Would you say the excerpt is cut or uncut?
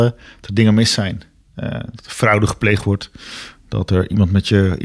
uncut